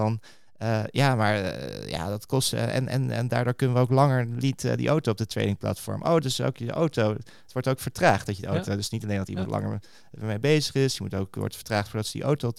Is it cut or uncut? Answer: uncut